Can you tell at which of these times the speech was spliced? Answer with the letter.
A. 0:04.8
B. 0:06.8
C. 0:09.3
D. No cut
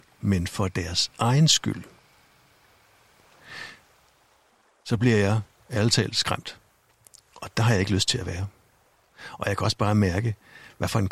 D